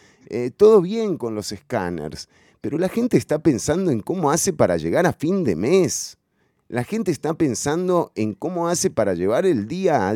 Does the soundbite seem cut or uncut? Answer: uncut